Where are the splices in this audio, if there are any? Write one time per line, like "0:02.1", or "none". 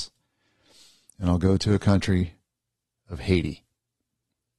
none